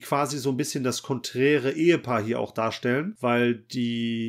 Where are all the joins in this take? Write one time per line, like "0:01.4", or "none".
none